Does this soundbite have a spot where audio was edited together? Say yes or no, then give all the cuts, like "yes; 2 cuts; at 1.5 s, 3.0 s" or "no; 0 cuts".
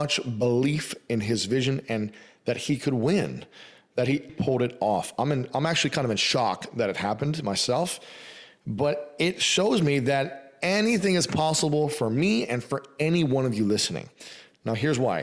yes; 1 cut; at 4.3 s